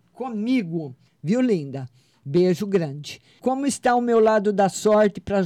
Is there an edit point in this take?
yes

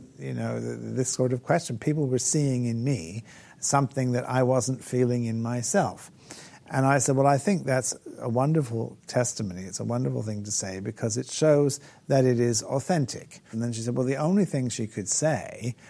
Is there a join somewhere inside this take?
yes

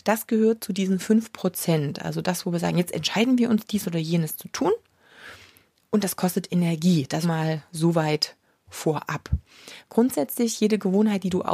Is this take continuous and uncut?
no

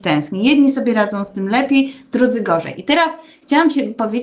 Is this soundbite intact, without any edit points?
yes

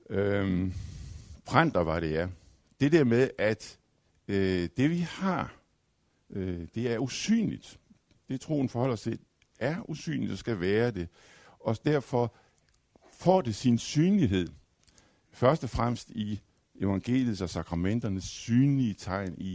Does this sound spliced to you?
no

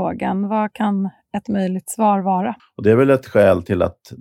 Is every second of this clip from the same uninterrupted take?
no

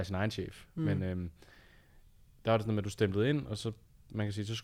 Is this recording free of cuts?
yes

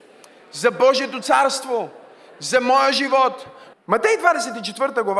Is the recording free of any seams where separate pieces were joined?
no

